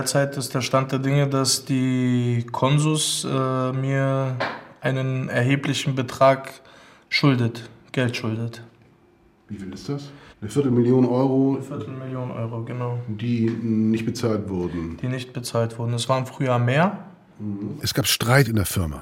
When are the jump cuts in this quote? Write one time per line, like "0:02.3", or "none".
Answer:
0:10.3
0:17.8